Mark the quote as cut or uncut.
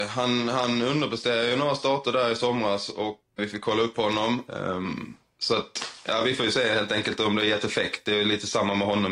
cut